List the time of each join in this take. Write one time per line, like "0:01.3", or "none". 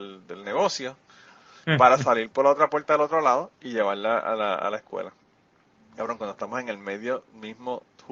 none